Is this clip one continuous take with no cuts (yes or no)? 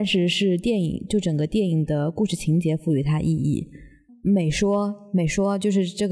no